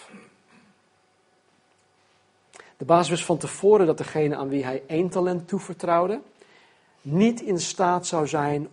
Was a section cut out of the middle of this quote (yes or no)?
no